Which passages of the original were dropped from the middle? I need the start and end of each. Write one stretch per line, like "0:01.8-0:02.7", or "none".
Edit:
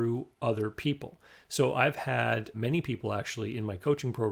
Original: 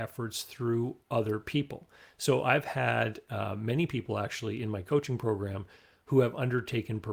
0:03.2-0:03.6